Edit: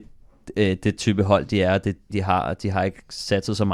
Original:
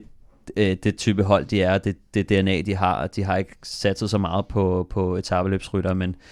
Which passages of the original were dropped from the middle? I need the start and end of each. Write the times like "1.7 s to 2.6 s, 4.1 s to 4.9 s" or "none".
2.1 s to 2.6 s